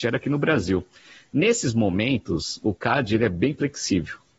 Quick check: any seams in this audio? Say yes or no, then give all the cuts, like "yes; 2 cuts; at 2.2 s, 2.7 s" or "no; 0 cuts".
no; 0 cuts